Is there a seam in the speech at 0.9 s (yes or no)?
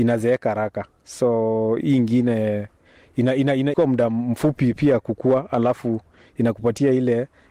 no